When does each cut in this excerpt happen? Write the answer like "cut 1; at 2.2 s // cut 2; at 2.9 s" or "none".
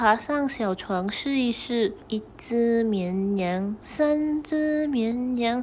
cut 1; at 2.0 s // cut 2; at 3.8 s

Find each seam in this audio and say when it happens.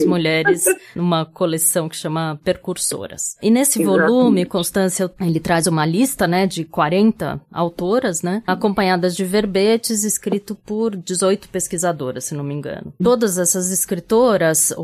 cut 1; at 13.0 s

